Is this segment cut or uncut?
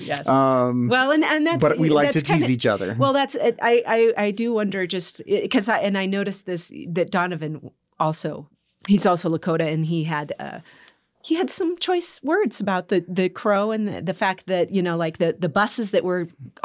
uncut